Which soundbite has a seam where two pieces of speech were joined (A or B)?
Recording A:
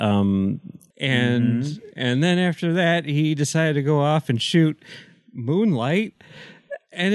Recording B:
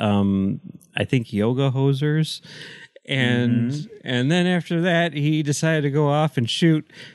A